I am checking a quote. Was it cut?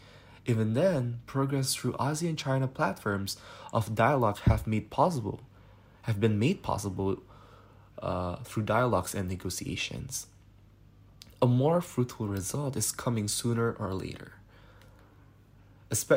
no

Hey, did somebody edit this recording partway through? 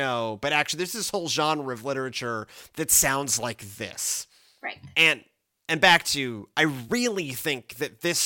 yes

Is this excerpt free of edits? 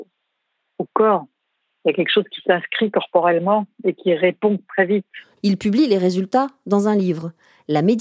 no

